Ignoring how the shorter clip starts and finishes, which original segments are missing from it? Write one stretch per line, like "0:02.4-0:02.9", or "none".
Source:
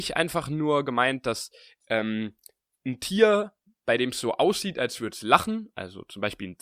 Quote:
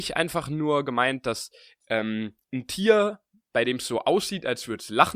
0:02.4-0:02.8